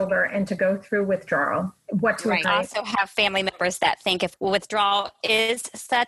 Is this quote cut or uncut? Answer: cut